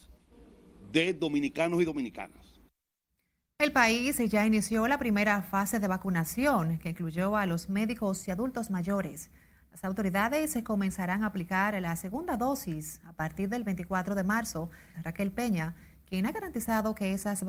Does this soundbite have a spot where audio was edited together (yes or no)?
yes